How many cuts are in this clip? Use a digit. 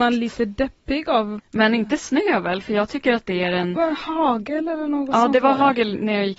1